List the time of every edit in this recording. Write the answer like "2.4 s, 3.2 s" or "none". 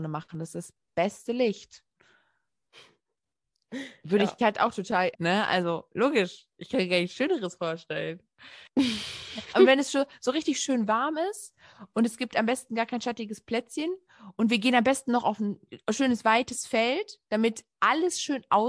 5.1 s, 8.7 s